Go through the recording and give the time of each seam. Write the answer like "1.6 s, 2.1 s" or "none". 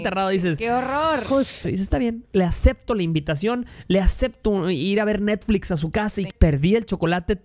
1.6 s, 6.3 s